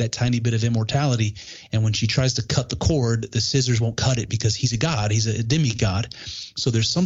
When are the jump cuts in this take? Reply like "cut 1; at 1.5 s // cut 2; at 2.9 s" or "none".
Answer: none

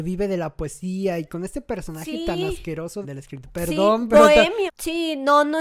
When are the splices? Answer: cut 1; at 3.0 s // cut 2; at 4.7 s

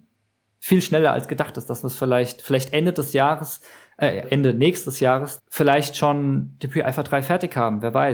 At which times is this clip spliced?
cut 1; at 4.2 s // cut 2; at 5.4 s

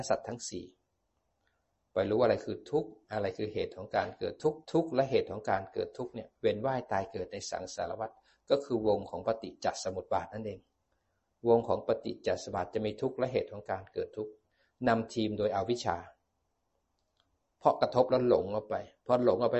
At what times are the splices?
cut 1; at 4.6 s

